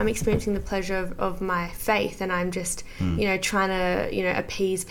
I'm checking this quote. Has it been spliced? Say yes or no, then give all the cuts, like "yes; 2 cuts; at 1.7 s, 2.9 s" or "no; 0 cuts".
no; 0 cuts